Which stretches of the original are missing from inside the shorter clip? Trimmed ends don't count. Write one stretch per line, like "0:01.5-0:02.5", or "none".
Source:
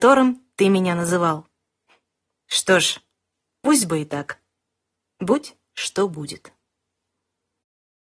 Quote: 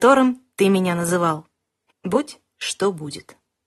0:01.9-0:05.1